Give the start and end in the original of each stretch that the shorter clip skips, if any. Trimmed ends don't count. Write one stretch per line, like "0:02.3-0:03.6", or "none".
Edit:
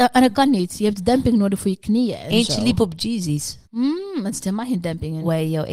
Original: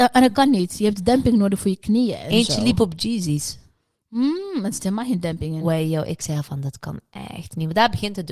0:03.7-0:04.1